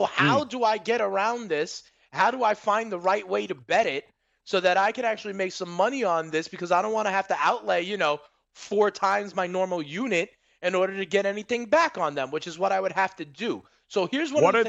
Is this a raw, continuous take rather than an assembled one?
yes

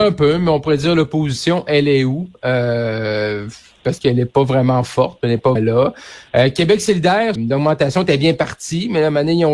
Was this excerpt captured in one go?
no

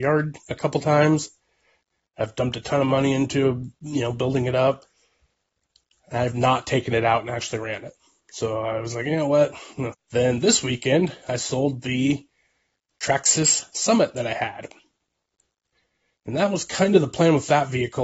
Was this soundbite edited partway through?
yes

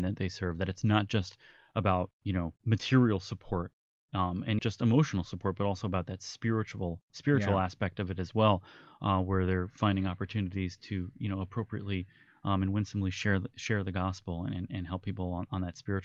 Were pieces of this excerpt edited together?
yes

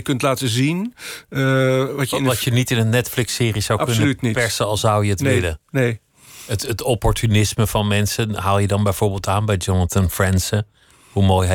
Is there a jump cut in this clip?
no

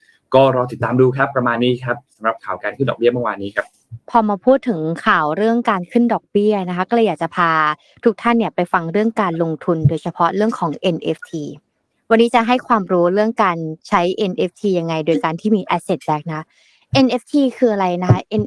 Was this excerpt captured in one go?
no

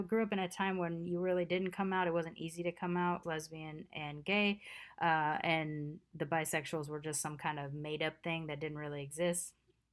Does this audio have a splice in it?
yes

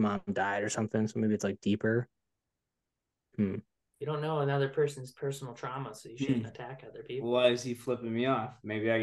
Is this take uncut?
yes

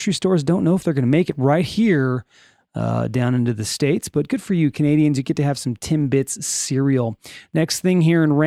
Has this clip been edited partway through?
no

